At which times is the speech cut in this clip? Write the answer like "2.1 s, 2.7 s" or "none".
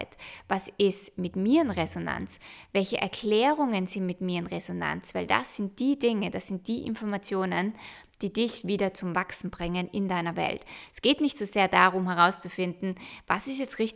none